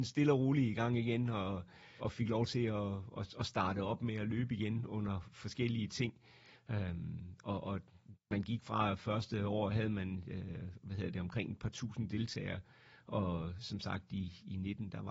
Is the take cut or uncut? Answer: cut